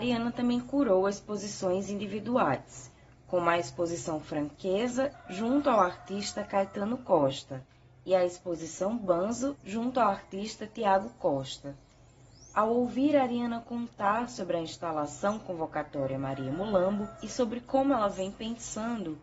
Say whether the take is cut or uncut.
cut